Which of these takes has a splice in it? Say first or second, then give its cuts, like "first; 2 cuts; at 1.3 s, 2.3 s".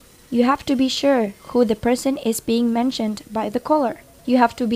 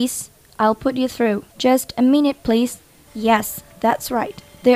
second; 2 cuts; at 1.5 s, 3.1 s